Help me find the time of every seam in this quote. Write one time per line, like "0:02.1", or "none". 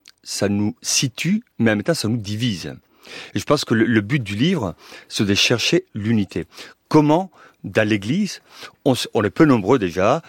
none